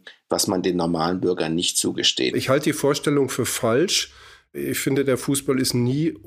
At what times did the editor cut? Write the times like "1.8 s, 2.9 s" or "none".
2.3 s